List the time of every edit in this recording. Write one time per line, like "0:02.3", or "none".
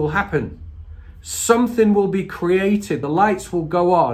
none